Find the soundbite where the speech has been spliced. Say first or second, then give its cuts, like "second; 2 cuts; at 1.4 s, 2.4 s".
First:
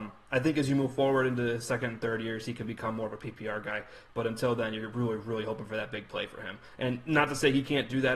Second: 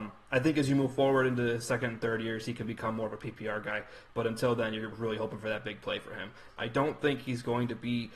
second; 2 cuts; at 4.9 s, 6.5 s